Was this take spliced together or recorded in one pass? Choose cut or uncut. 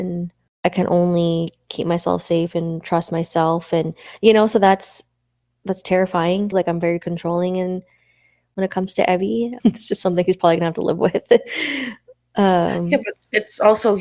cut